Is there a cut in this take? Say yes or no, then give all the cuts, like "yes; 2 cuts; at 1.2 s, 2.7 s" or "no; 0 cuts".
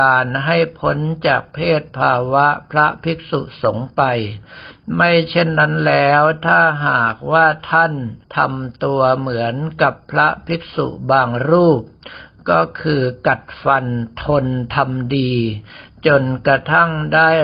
yes; 1 cut; at 8.2 s